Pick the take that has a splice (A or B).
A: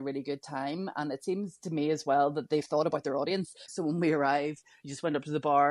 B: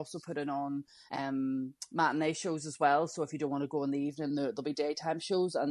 A